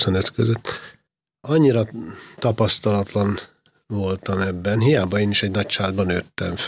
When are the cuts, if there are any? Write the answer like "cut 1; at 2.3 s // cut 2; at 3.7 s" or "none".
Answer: none